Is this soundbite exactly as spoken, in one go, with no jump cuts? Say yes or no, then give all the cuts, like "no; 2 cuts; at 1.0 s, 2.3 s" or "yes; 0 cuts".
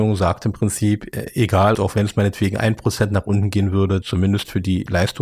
no; 2 cuts; at 1.7 s, 4.0 s